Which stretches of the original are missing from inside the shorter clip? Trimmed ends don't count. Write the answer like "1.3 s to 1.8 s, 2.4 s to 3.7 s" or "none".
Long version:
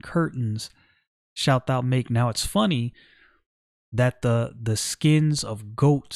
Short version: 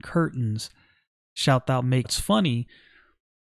2.0 s to 2.3 s